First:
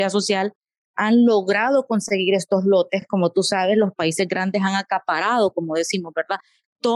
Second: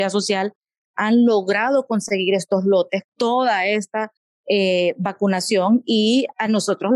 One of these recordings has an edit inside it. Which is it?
second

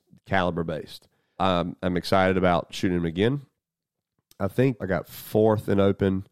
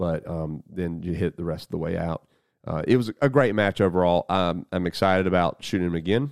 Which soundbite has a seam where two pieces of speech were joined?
first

